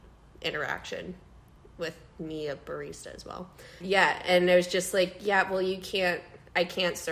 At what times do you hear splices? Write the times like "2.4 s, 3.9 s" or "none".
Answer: 3.8 s